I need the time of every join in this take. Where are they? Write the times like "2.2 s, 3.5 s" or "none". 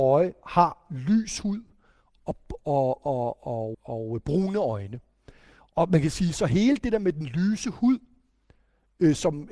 3.7 s